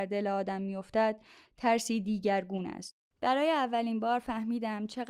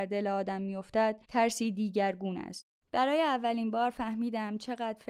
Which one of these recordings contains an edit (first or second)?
second